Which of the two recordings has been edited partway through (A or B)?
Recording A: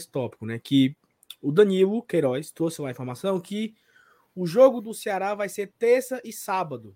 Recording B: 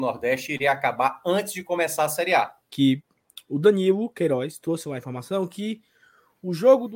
B